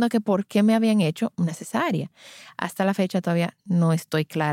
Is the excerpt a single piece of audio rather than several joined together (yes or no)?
yes